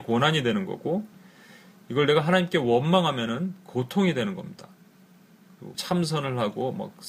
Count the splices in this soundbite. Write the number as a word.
one